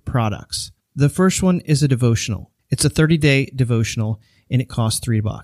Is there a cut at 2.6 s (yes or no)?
yes